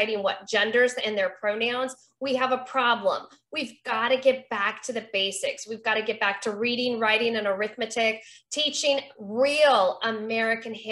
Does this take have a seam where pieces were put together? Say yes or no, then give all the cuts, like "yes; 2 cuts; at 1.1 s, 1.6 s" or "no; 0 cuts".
no; 0 cuts